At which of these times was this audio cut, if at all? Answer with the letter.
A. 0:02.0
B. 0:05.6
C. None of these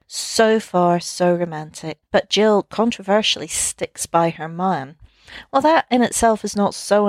A